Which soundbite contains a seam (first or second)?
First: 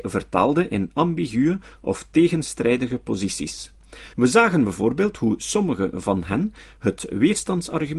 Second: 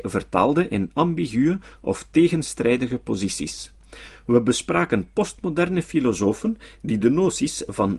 first